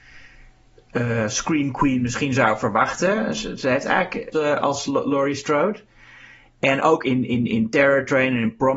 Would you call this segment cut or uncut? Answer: cut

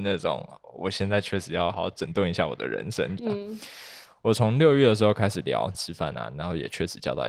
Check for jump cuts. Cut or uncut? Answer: cut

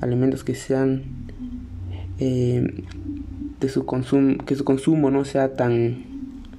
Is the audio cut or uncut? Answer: uncut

